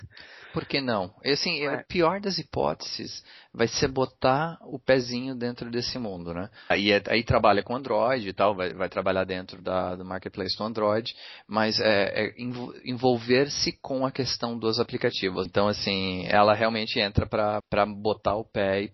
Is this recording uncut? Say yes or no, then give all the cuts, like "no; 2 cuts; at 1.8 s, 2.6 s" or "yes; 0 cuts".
no; 3 cuts; at 6.7 s, 15.5 s, 17.6 s